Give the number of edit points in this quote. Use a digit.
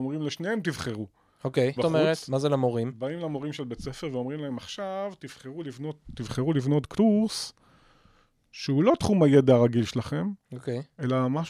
1